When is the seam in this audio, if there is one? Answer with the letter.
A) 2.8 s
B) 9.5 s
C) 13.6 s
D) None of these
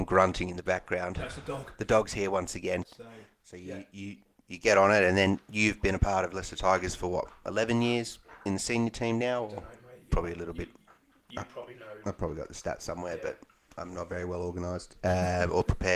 A